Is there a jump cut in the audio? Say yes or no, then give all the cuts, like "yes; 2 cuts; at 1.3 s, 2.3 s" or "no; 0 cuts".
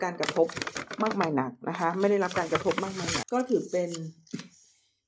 yes; 1 cut; at 3.2 s